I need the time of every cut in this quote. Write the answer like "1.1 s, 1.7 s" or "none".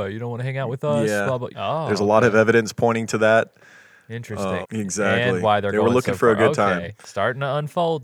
1.5 s, 4.6 s